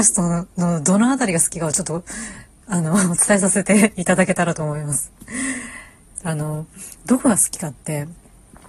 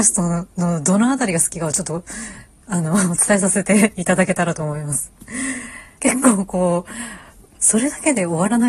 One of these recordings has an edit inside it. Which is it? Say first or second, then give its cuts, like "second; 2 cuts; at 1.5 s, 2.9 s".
second; 2 cuts; at 6.0 s, 7.5 s